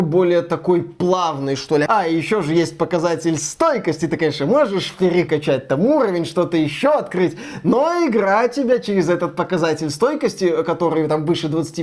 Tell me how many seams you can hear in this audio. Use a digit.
1